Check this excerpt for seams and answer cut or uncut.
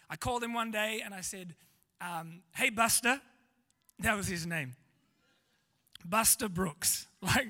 uncut